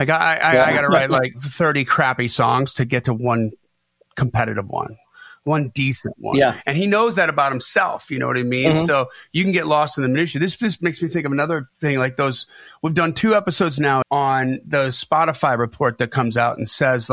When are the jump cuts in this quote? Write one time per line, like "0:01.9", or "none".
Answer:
0:11.7
0:14.0